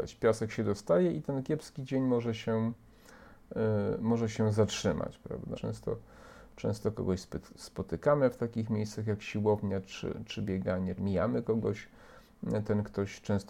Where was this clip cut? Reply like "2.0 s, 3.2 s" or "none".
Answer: 5.5 s, 11.0 s